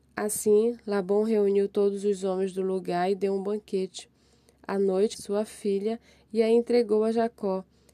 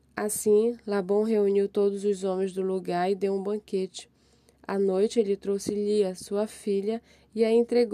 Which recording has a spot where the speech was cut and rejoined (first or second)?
first